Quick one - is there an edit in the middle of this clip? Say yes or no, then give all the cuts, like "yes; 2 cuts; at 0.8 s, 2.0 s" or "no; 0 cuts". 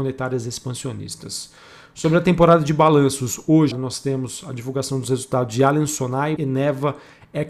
yes; 2 cuts; at 3.7 s, 6.4 s